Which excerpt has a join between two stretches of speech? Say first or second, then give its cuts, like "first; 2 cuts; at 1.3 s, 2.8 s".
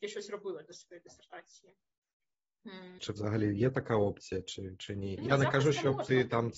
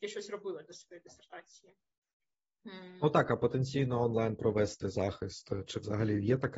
first; 1 cut; at 3.0 s